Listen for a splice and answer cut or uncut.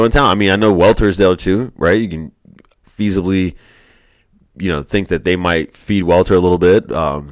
uncut